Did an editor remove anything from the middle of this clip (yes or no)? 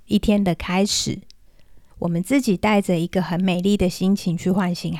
yes